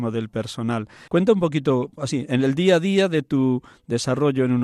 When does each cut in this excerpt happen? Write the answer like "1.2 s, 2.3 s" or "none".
1.1 s